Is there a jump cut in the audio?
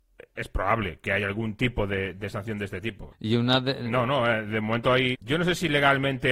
yes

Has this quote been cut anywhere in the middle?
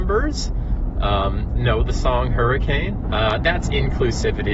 yes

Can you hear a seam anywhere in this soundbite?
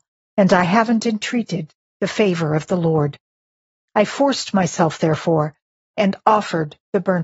no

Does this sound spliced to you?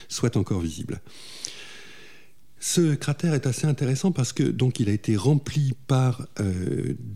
no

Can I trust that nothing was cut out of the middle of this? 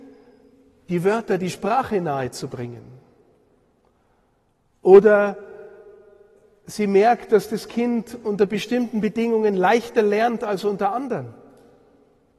yes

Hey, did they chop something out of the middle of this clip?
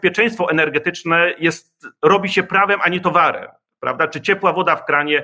no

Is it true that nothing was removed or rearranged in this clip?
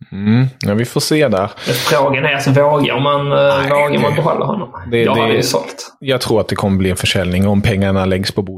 yes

